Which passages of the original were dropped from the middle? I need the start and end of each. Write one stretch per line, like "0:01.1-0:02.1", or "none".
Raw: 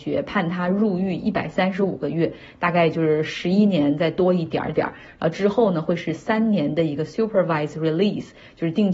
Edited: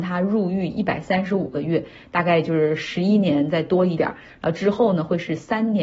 0:04.5-0:04.8